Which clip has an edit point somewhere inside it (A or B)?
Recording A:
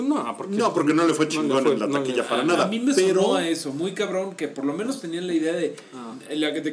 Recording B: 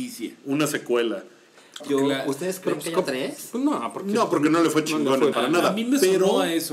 B